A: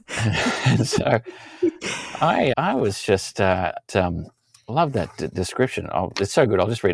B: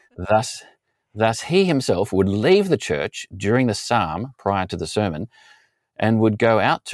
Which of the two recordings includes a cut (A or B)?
A